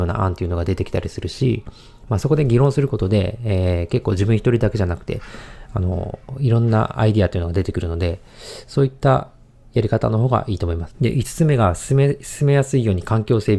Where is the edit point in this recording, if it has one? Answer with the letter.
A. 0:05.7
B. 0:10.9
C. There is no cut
B